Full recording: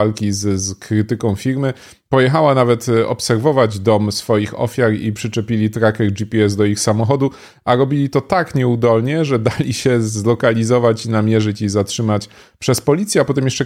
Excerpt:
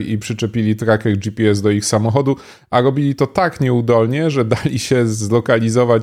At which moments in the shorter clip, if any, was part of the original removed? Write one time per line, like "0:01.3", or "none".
none